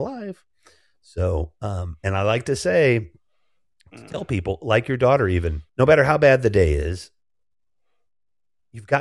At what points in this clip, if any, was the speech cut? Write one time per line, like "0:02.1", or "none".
0:05.7